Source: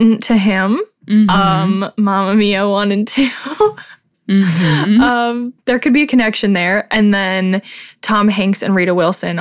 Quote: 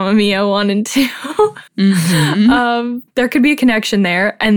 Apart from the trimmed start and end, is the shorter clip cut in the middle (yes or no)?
yes